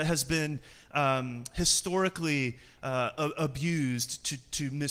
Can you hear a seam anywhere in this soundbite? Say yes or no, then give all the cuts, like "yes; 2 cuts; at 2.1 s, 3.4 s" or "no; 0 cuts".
no; 0 cuts